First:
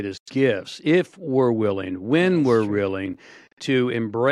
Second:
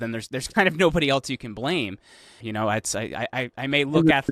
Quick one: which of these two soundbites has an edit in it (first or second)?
second